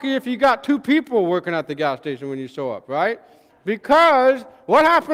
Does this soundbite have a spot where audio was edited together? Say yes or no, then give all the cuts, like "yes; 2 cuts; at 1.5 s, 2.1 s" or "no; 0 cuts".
yes; 1 cut; at 3.5 s